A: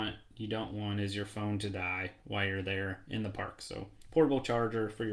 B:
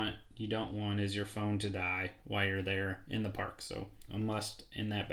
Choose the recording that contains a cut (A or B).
B